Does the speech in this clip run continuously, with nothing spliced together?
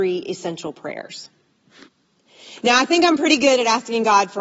yes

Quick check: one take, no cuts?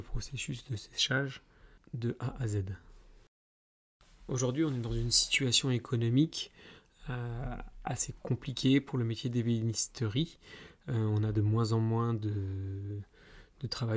yes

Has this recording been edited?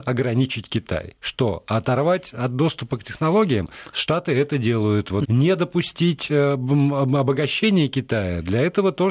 yes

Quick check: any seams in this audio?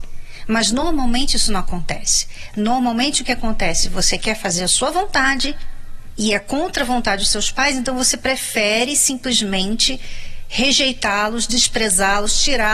no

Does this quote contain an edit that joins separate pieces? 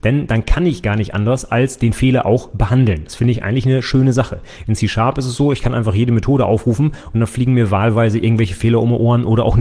no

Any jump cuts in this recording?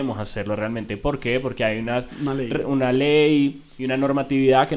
no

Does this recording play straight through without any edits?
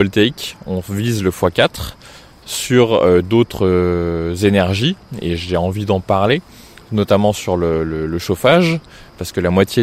yes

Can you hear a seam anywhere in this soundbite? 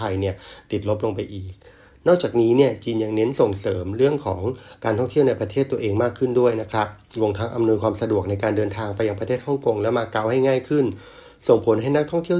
no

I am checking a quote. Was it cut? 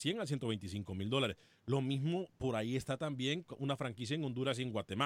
no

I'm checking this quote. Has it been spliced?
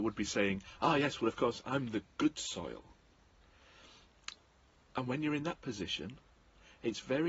no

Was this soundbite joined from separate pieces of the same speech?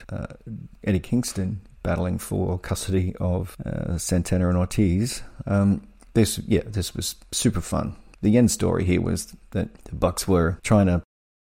yes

